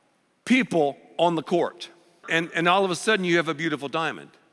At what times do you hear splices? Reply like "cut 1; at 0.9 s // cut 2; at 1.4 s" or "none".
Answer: cut 1; at 2.2 s